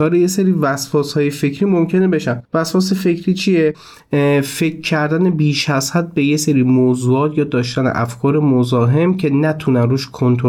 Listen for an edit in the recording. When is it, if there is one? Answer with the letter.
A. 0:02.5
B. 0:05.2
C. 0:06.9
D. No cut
A